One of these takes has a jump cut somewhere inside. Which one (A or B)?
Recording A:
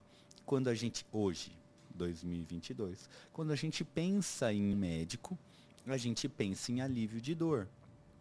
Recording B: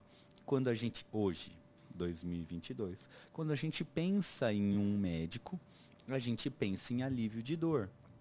A